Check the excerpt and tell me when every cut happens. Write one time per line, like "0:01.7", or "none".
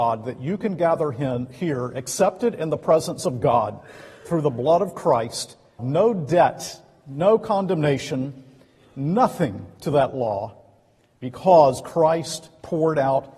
0:05.8